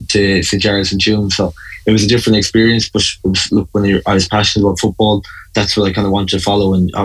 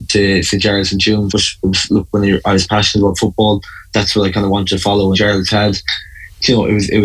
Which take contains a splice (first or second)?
second